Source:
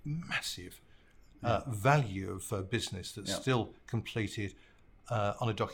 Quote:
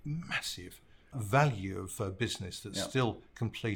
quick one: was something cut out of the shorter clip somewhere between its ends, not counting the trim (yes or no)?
yes